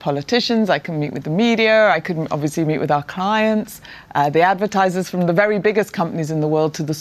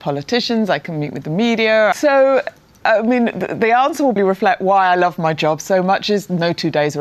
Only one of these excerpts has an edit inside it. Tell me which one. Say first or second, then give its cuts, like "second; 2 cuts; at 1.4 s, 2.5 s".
second; 2 cuts; at 1.9 s, 4.2 s